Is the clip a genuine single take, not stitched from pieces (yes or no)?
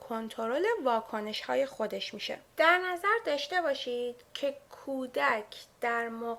no